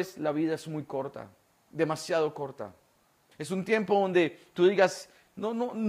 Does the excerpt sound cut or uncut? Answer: cut